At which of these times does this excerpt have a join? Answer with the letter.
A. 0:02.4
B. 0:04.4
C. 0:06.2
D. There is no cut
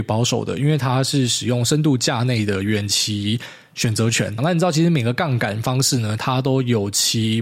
B